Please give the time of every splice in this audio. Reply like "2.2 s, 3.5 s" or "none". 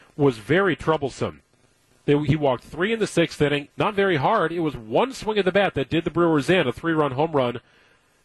3.7 s